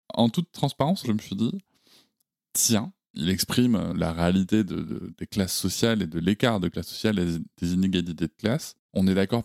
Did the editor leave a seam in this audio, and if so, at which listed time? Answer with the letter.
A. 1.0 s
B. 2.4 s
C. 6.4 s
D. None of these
A